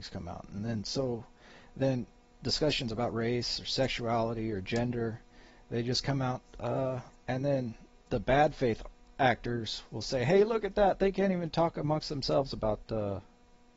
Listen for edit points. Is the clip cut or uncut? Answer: cut